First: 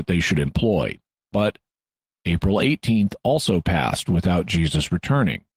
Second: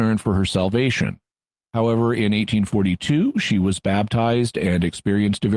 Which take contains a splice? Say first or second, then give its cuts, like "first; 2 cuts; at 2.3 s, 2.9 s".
first; 1 cut; at 1.2 s